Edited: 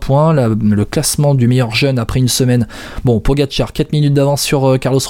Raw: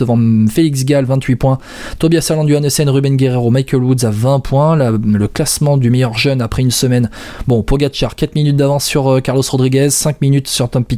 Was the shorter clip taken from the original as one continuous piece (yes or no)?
yes